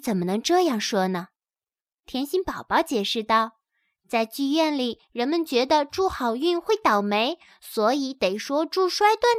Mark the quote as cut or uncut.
uncut